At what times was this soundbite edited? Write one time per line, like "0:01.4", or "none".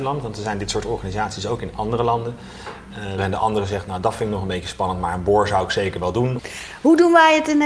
0:03.2
0:06.4